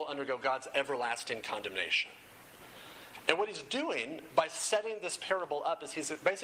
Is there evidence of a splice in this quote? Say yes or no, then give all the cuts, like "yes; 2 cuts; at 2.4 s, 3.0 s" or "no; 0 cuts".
no; 0 cuts